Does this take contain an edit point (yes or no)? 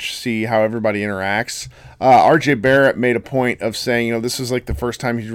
no